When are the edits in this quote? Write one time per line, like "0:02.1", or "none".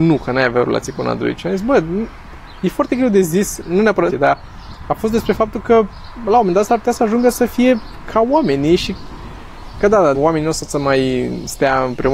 0:04.1
0:10.1